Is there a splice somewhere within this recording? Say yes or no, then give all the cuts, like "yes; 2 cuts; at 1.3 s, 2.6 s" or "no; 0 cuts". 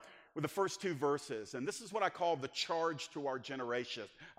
no; 0 cuts